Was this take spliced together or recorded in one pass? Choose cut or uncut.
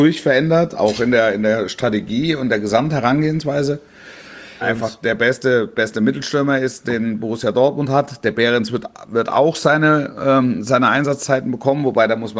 cut